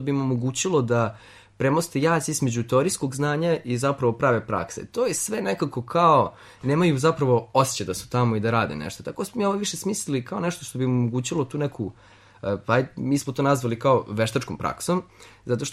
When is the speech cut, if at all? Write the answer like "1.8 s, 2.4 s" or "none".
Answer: none